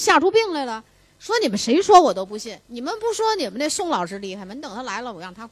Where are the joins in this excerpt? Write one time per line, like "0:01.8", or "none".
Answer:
none

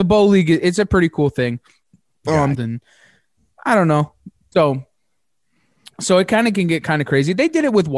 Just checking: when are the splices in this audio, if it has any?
0:02.5
0:04.5

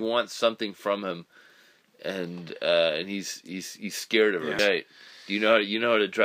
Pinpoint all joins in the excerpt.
0:04.6

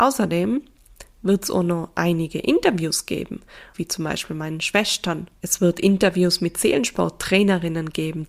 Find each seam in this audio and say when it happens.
0:03.7
0:05.4

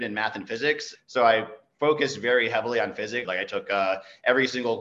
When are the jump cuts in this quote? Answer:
0:01.0
0:03.2

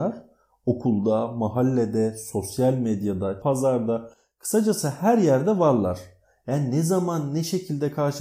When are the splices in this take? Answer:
0:03.4

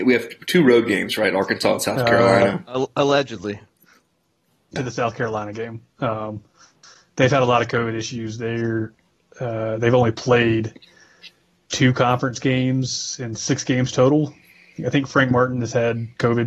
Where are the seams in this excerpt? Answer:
0:04.8

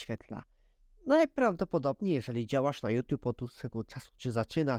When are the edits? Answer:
none

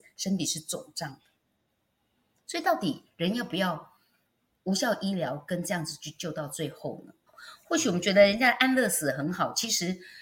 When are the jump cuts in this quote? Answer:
0:07.3

